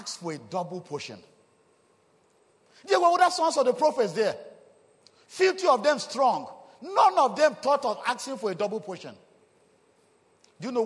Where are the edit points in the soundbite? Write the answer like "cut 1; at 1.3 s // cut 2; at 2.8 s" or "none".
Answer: none